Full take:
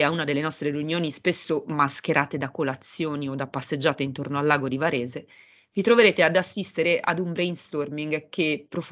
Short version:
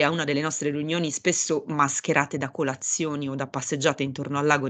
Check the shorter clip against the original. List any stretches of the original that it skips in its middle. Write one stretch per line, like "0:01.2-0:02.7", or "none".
none